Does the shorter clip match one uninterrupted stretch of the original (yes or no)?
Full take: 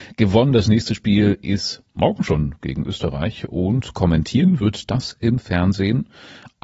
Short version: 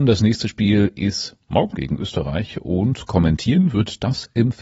no